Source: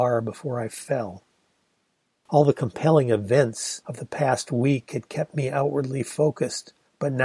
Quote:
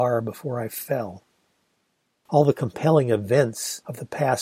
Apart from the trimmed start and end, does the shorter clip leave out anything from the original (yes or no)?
no